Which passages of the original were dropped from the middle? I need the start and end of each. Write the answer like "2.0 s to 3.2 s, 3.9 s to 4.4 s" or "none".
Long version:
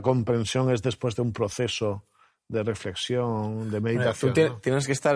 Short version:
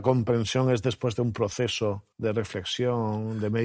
2.1 s to 2.4 s